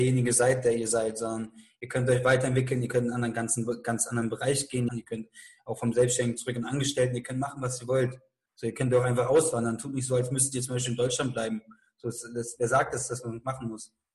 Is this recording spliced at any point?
yes; 1 cut; at 4.9 s

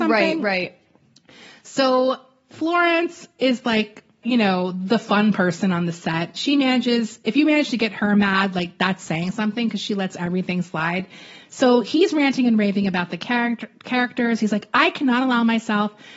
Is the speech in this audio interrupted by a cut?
yes; 1 cut; at 4.2 s

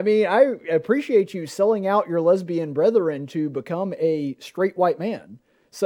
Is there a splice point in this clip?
no; 0 cuts

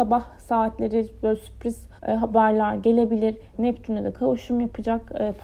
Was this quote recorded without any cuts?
no; 2 cuts; at 2.0 s, 3.5 s

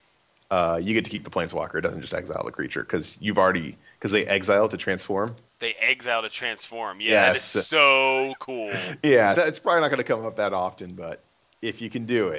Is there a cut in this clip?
yes; 1 cut; at 9.4 s

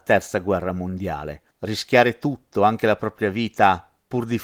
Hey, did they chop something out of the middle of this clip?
yes; 1 cut; at 1.5 s

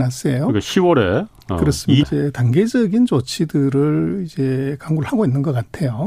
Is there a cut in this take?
yes; 1 cut; at 2.0 s

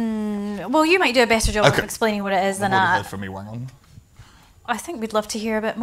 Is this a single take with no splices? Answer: yes; 0 cuts

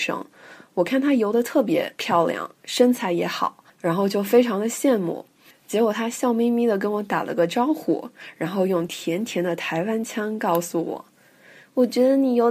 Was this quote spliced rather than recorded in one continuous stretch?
no; 0 cuts

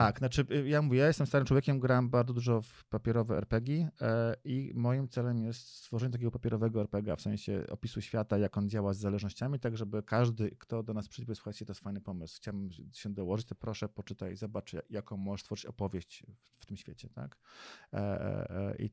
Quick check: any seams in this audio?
no; 0 cuts

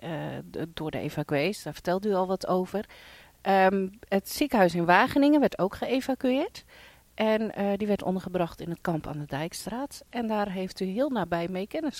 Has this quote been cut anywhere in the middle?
no; 0 cuts

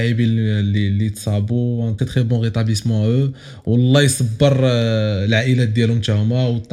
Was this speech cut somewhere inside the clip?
yes; 1 cut; at 2.0 s

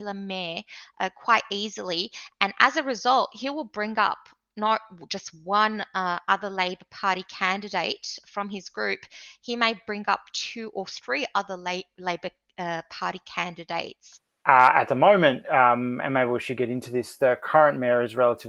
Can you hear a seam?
no; 0 cuts

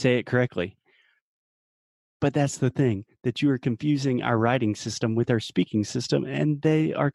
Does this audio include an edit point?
no; 0 cuts

